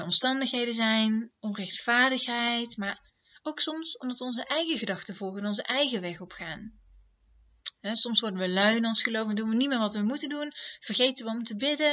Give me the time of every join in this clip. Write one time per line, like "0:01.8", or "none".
none